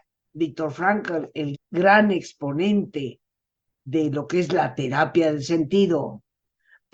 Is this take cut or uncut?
cut